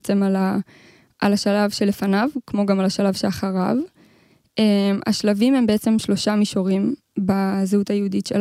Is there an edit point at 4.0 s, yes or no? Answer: no